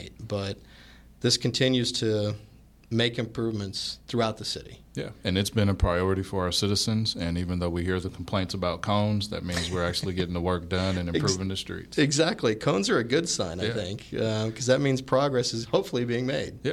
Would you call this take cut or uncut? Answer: uncut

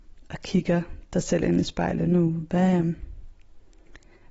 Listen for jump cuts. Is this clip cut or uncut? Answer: uncut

